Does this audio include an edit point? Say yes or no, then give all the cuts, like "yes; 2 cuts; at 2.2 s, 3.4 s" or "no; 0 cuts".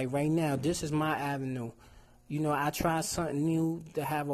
no; 0 cuts